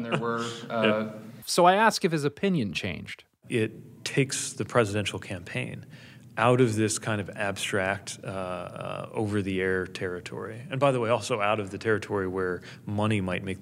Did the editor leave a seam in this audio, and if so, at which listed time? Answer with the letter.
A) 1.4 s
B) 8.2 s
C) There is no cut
A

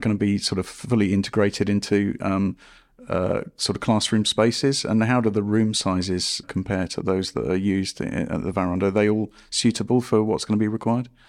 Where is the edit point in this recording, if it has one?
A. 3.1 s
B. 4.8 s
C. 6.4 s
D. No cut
C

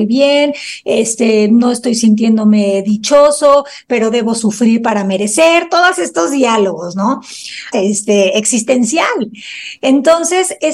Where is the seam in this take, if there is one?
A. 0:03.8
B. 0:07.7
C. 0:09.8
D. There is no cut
B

